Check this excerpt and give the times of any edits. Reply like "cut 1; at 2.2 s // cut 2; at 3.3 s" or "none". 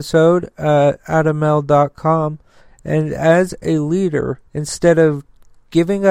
cut 1; at 2.7 s // cut 2; at 4.5 s